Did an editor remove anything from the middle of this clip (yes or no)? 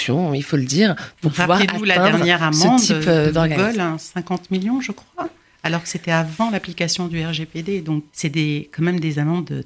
yes